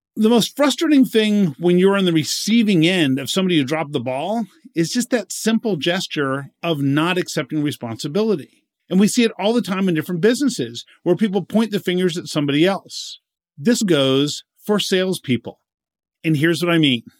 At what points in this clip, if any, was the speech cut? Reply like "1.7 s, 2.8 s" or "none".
13.8 s